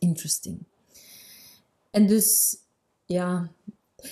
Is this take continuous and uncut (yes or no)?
yes